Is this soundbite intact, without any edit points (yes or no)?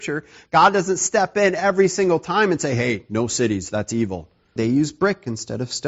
no